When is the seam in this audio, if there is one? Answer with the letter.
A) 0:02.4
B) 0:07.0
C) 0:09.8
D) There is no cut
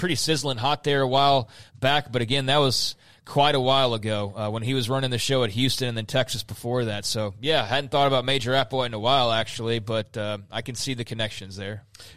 D